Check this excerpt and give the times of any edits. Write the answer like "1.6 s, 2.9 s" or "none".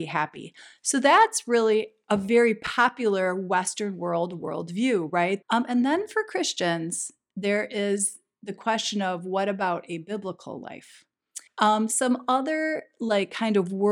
5.4 s, 11.5 s